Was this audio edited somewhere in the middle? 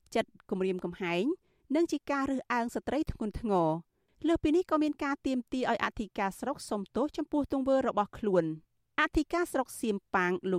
no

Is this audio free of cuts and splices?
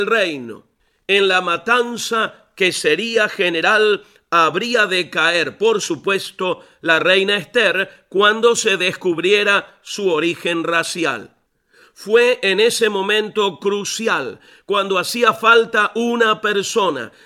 yes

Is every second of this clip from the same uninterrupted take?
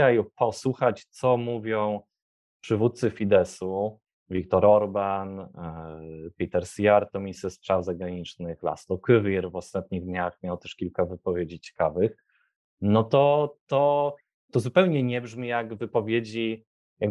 yes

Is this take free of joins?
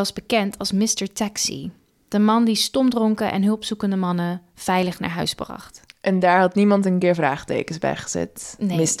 yes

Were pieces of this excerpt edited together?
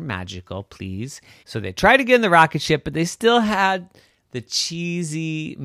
yes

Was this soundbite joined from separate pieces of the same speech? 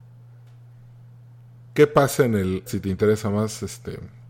yes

